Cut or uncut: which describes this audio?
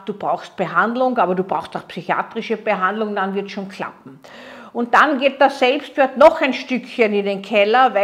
uncut